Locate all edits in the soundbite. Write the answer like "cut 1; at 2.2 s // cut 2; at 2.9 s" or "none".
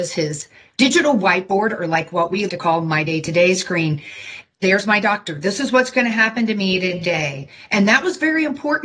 cut 1; at 2.5 s // cut 2; at 4.4 s